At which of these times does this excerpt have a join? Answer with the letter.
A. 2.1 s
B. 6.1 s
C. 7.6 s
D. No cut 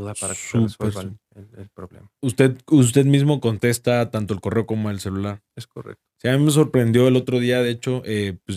D